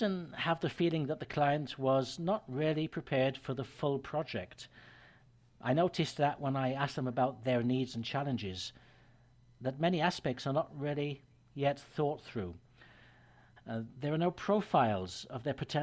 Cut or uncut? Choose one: cut